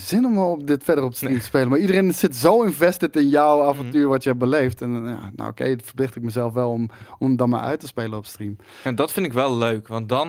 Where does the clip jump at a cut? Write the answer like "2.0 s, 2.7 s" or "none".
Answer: none